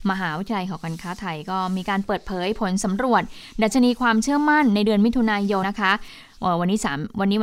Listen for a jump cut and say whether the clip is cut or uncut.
cut